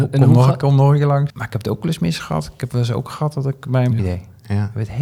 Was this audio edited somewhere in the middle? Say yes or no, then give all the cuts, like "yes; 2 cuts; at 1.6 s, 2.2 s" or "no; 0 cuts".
yes; 2 cuts; at 1.3 s, 4.0 s